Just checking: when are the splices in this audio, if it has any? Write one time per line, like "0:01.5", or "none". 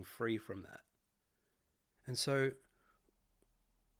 0:02.0